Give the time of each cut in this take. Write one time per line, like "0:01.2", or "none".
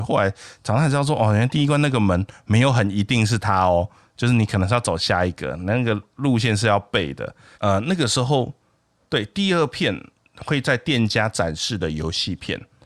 0:07.5